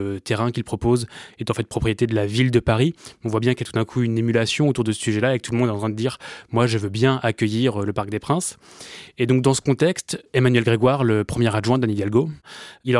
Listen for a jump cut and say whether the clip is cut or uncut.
uncut